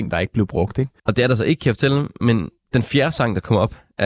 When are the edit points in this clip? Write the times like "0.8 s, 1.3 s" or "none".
1.0 s